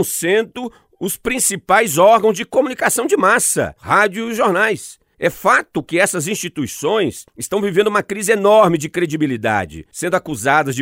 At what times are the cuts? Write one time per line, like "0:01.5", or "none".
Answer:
0:03.8